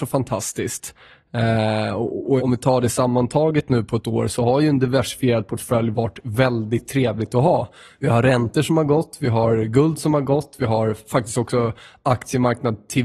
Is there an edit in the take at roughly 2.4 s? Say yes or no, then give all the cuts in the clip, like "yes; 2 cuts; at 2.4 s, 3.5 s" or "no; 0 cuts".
yes; 1 cut; at 2.4 s